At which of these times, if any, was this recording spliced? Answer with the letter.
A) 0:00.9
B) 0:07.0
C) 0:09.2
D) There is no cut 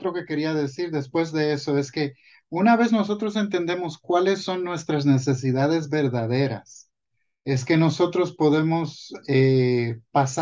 D